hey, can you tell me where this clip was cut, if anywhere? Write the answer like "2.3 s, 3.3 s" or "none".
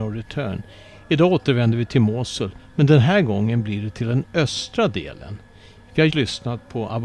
6.1 s